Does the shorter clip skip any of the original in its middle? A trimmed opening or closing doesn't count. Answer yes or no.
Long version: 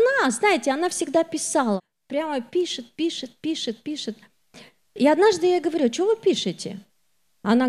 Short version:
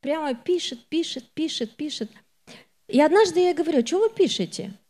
no